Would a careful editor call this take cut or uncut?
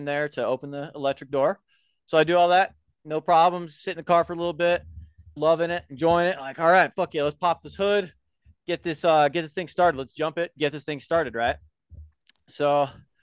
cut